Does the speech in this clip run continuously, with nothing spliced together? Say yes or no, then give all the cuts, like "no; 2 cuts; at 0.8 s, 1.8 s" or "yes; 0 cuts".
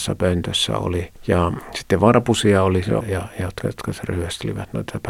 no; 1 cut; at 3.0 s